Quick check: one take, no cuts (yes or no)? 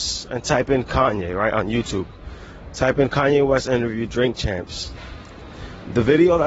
yes